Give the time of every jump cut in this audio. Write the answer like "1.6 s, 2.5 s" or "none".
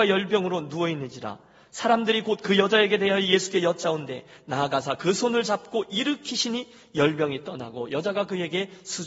none